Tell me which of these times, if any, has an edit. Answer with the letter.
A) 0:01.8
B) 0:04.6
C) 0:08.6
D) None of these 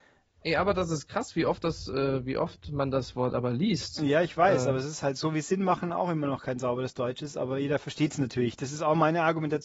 D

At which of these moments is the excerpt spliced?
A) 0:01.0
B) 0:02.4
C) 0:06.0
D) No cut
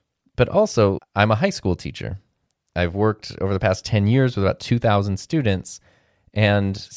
A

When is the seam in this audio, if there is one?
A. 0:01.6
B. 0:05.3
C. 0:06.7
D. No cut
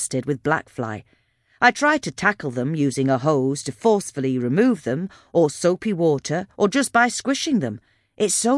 D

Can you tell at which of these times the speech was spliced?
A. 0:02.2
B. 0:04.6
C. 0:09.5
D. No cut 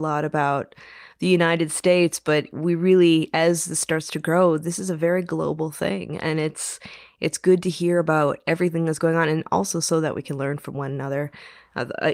D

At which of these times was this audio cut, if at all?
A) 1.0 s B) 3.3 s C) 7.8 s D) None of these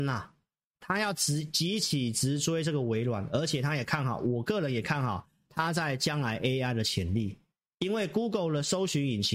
D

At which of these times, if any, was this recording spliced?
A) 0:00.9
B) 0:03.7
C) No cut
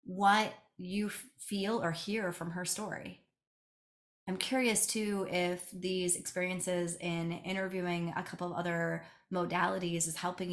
C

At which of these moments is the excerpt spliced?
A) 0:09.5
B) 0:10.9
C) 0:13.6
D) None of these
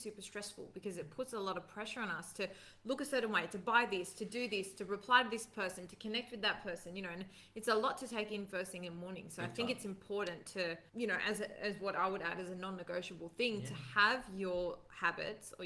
B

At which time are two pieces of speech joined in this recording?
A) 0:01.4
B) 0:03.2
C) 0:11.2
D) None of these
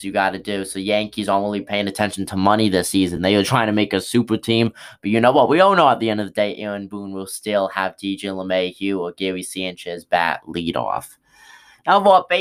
D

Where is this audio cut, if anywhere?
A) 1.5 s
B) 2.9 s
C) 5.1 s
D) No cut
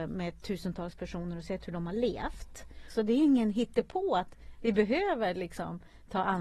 B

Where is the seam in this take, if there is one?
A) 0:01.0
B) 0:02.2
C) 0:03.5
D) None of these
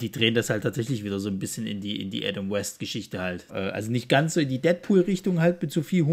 C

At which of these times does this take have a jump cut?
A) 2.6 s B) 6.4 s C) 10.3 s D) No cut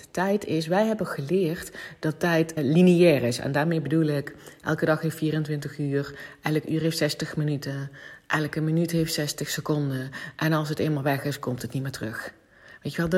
A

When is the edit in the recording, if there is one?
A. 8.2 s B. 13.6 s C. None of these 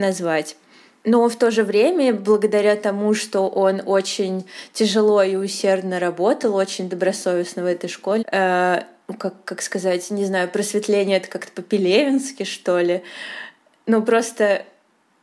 A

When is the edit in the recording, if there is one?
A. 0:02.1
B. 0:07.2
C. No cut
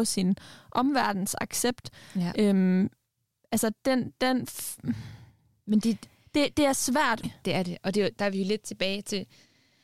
B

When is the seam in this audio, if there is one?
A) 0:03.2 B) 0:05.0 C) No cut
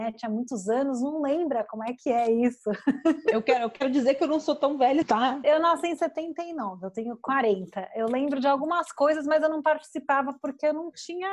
B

